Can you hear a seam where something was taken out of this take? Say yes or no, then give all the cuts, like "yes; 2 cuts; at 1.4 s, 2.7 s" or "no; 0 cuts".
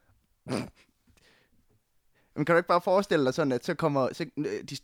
no; 0 cuts